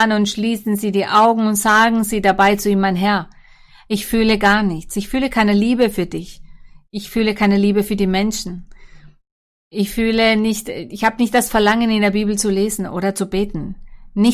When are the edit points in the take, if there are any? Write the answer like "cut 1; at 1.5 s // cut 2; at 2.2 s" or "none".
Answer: none